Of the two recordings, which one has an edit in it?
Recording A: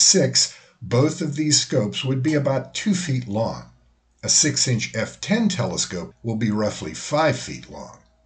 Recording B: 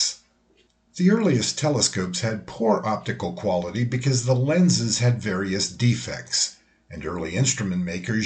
A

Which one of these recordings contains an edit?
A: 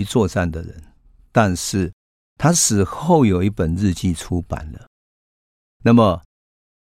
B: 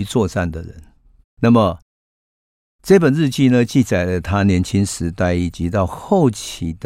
B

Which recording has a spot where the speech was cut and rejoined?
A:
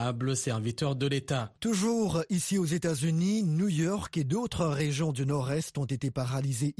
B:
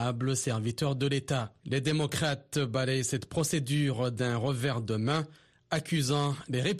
A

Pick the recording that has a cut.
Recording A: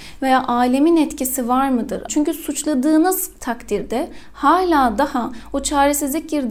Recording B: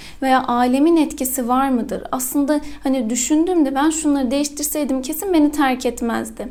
A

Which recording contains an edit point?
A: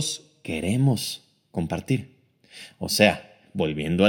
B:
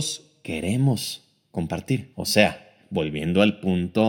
B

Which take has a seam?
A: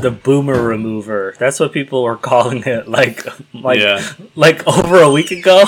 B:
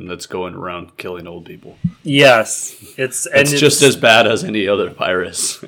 B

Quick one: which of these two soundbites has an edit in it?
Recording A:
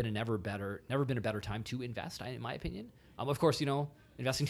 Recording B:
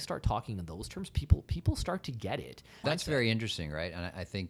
B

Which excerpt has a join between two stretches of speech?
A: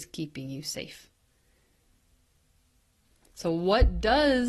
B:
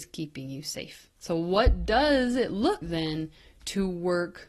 B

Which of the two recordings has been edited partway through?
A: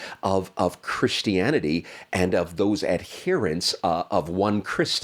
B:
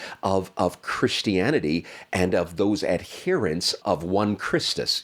B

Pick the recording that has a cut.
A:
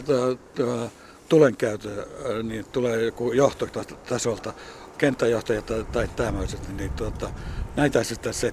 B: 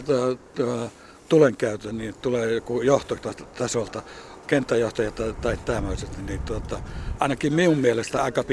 B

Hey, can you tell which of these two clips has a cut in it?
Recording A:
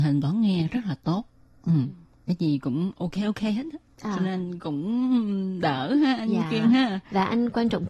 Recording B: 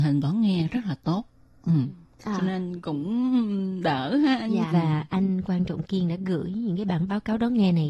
B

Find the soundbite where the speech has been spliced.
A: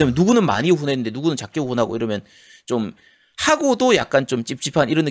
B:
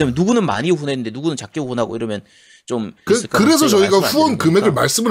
B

